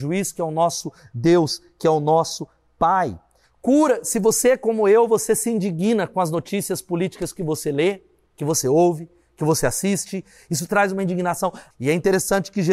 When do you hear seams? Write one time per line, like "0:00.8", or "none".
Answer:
0:03.4
0:11.7